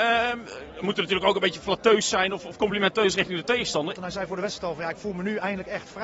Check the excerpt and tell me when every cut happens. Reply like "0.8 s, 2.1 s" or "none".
3.9 s